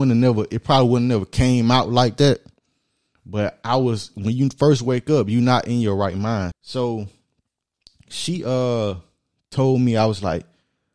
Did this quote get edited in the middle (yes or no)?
yes